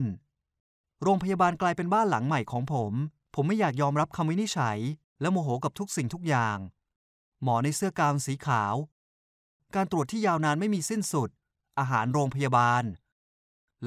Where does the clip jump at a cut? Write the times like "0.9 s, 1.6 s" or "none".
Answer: none